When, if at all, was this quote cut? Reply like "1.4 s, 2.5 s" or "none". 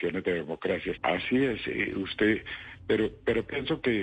1.0 s